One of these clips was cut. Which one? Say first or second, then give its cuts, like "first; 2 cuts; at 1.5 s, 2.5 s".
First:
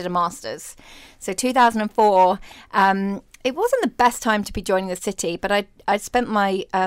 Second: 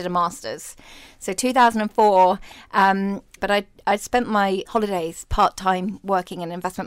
second; 2 cuts; at 3.4 s, 4.6 s